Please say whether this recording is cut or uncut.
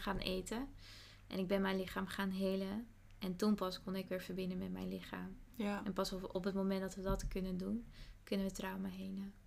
uncut